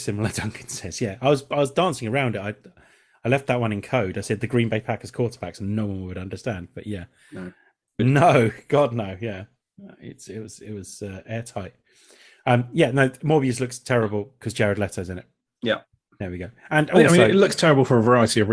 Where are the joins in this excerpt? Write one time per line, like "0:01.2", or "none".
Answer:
0:08.0